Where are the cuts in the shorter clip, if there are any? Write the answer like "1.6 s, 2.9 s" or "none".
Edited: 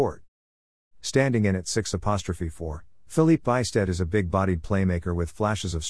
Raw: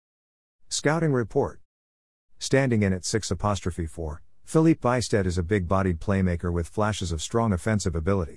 none